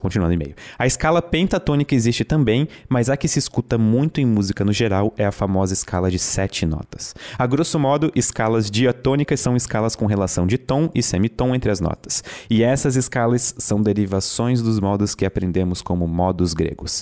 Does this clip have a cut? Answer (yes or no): no